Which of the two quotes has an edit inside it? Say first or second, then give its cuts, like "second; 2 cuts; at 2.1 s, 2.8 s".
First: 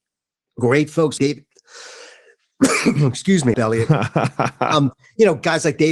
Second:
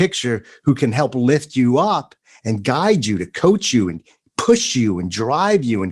first; 2 cuts; at 1.2 s, 3.5 s